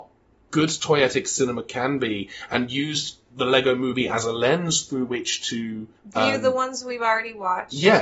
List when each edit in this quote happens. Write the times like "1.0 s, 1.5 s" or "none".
6.0 s